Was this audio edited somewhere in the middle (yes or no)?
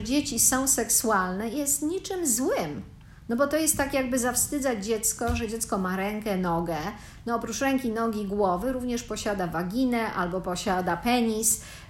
no